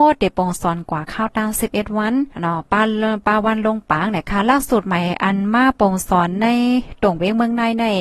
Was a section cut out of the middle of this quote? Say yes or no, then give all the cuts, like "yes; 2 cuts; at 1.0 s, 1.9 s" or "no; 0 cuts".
yes; 1 cut; at 2.3 s